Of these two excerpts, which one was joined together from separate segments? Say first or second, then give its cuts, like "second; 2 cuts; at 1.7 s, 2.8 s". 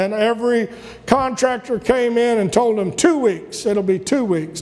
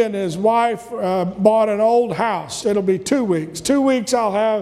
second; 1 cut; at 2.6 s